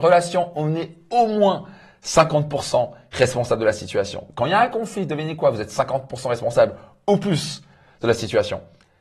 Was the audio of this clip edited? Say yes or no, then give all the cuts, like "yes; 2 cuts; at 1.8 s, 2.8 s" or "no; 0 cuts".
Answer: no; 0 cuts